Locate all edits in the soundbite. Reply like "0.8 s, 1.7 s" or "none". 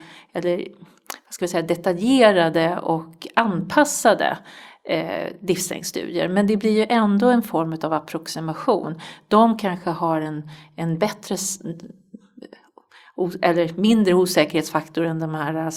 none